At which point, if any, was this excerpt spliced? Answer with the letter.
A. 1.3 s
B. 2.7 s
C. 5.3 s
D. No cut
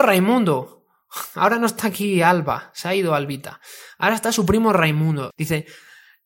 C